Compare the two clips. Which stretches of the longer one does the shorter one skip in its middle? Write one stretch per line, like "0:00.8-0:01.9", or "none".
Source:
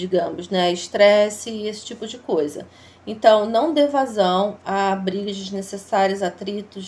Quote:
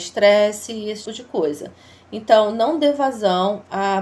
0:01.8-0:02.0